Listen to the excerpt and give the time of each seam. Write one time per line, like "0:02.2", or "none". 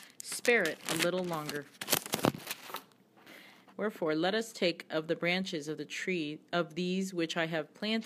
0:03.7

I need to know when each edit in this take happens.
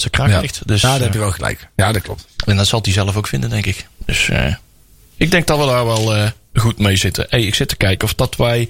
0:07.7

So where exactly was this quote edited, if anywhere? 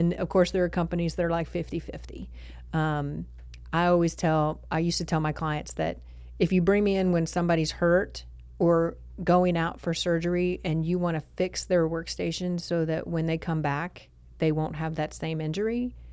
none

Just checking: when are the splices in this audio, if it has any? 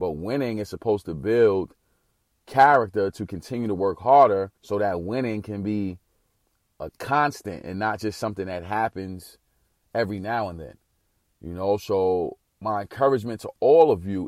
0:04.6

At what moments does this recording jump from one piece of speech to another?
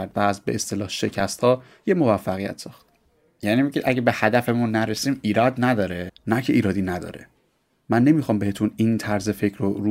0:06.1

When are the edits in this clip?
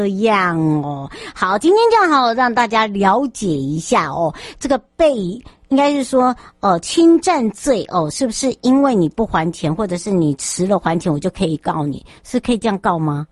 none

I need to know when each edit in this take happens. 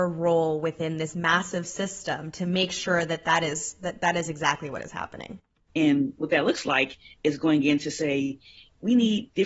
0:05.7

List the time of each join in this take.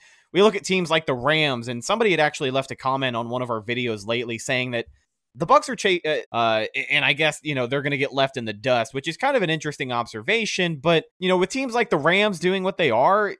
0:06.2
0:11.1

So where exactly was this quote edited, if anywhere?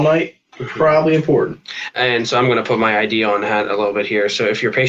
none

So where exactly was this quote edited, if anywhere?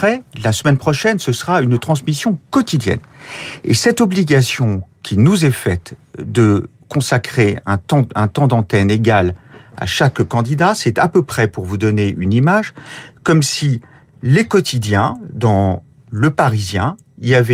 none

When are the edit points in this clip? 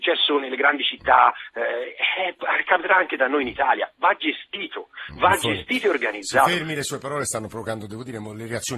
none

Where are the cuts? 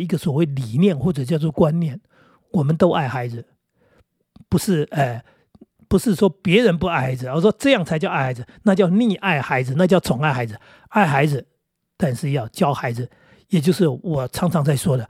none

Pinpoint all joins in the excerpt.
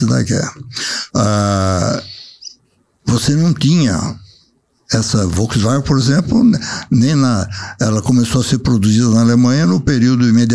0:01.1

